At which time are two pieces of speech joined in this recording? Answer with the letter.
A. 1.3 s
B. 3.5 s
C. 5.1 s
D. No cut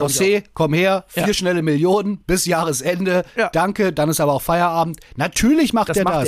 D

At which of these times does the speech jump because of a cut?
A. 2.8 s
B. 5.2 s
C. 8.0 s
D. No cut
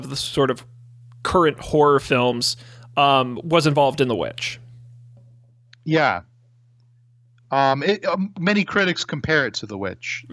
D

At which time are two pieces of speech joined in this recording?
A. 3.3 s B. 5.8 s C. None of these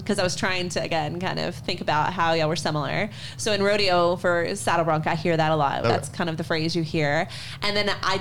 B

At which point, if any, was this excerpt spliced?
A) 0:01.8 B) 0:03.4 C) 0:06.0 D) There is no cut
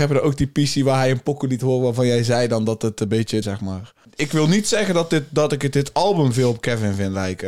B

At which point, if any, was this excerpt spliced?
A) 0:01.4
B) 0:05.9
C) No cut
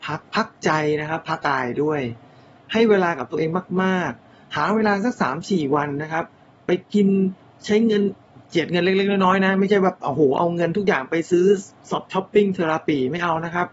A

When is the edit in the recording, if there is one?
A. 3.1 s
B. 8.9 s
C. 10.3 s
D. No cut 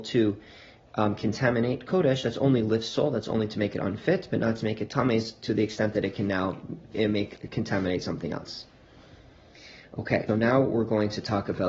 C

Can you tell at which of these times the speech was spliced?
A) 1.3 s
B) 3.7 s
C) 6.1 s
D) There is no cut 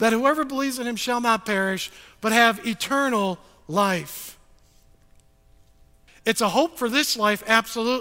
C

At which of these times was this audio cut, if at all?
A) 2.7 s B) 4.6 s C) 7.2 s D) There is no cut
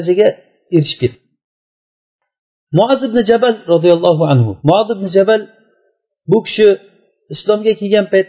B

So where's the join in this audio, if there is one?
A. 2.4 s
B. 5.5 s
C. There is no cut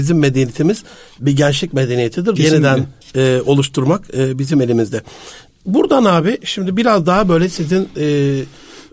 A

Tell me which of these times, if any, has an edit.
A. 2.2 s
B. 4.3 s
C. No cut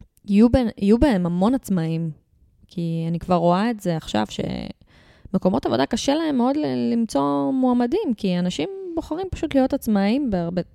C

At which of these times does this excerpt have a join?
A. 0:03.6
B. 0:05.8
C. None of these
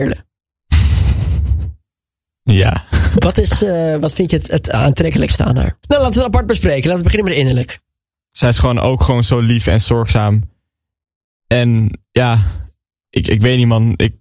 B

